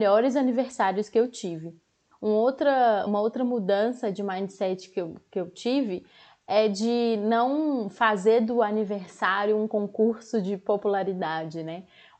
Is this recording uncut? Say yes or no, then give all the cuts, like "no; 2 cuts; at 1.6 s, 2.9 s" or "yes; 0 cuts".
yes; 0 cuts